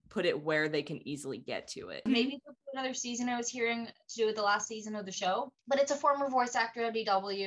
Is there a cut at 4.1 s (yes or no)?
no